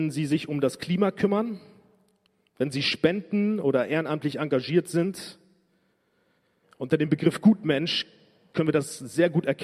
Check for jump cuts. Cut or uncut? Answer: cut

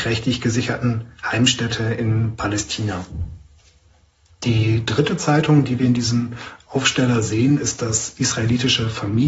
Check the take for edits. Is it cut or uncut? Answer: uncut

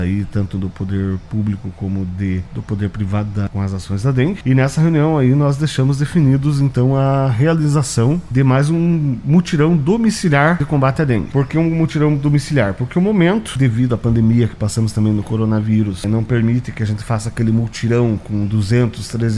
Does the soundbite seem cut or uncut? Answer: cut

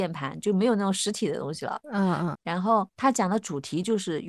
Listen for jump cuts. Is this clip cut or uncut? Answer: cut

